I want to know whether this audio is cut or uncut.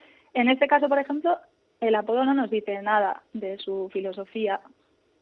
uncut